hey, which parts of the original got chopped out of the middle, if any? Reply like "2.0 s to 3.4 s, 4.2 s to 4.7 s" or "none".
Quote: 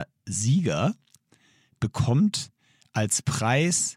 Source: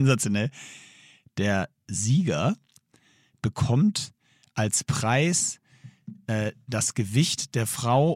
none